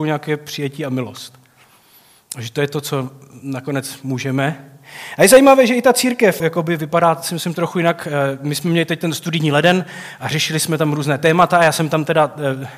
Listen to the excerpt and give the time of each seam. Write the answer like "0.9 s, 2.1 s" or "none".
6.4 s